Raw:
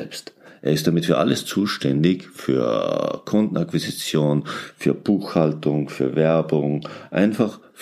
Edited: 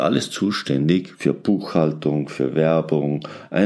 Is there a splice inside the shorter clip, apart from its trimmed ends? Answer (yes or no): yes